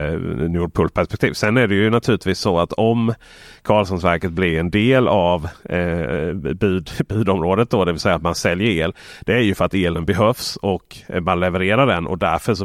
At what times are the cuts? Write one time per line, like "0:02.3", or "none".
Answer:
none